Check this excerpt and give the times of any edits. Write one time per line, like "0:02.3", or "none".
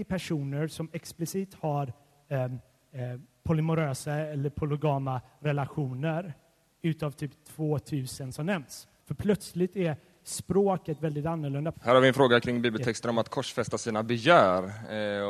0:09.0
0:11.7